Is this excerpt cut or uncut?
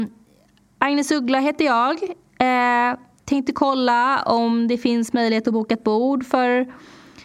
uncut